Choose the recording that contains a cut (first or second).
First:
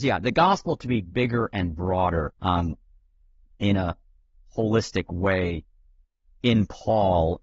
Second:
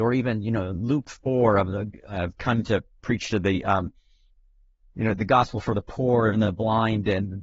first